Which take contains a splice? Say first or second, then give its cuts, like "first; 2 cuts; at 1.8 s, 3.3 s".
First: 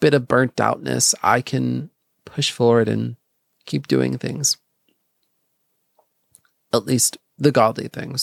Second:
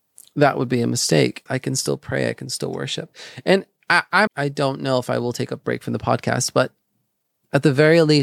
second; 2 cuts; at 1.5 s, 4.3 s